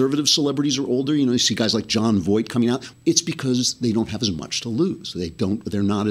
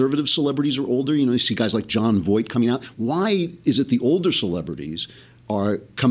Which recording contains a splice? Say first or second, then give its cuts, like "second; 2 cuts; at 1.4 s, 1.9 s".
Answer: first; 1 cut; at 2.9 s